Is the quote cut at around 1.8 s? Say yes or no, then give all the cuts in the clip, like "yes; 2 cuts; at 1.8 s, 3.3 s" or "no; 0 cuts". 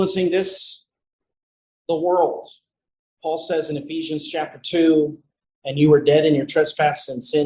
no; 0 cuts